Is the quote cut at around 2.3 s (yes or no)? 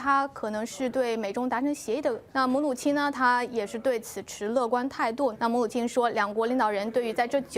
yes